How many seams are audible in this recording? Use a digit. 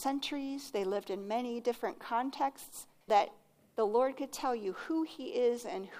1